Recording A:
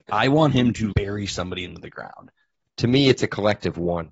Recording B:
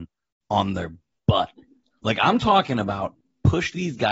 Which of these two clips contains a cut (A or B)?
A